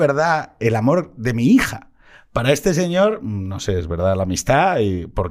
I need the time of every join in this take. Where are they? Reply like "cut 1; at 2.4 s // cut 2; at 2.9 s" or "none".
none